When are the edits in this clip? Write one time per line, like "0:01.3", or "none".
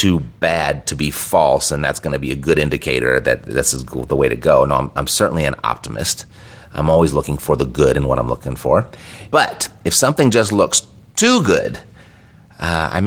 0:09.3

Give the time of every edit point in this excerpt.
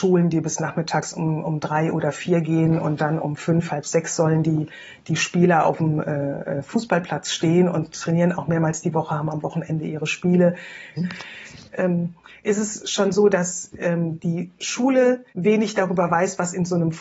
0:11.0
0:15.3

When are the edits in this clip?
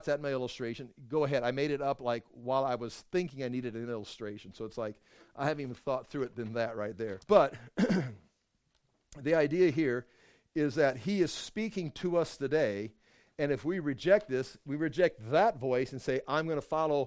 0:07.2

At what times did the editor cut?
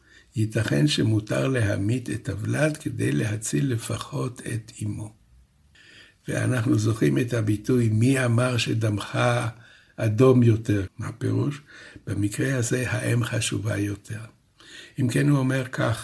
0:10.9

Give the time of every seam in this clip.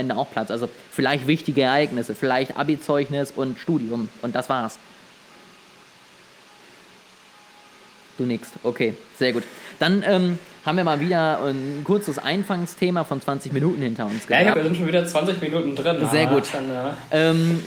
0:14.5

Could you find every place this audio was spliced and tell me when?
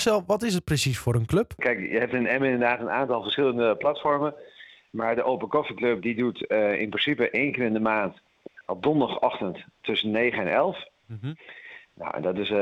none

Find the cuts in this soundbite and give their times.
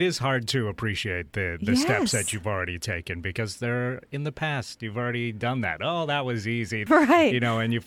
0:06.9

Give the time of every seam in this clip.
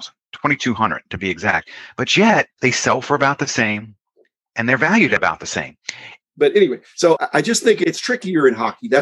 0:02.5
0:06.2

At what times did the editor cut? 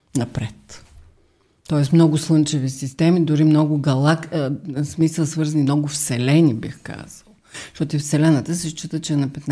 none

